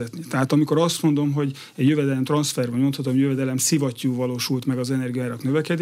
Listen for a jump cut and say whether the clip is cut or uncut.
uncut